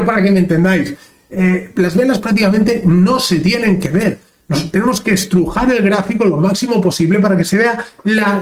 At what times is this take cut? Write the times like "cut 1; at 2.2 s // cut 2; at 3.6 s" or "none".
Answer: none